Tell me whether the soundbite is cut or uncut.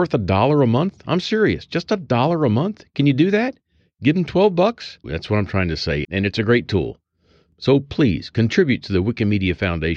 cut